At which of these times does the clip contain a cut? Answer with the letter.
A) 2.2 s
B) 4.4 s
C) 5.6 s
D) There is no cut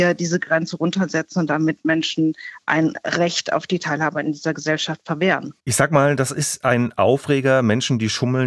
C